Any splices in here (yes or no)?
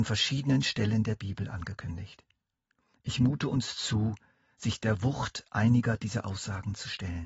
no